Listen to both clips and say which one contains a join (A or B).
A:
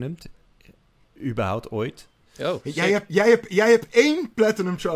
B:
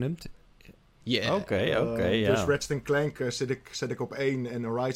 B